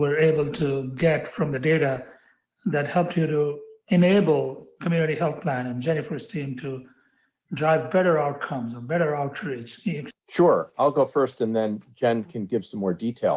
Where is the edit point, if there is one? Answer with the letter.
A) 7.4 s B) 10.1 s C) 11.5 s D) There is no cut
B